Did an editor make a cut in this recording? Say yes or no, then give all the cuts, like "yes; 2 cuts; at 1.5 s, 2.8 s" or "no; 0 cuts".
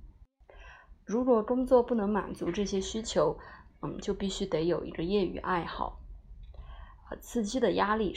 no; 0 cuts